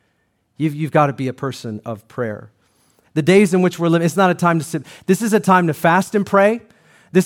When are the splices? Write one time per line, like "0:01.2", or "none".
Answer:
0:03.0